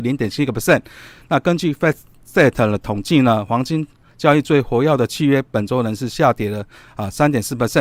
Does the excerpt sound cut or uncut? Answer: uncut